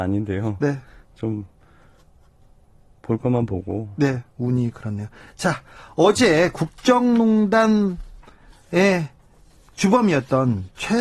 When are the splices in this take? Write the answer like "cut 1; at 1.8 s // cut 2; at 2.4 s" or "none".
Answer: cut 1; at 4.3 s